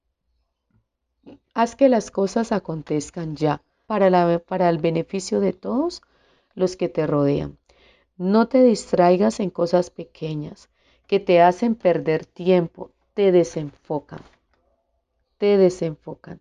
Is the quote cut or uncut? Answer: cut